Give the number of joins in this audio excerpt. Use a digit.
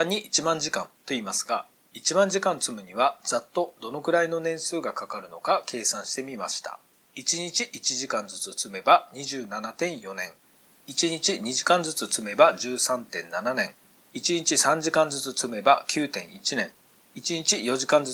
1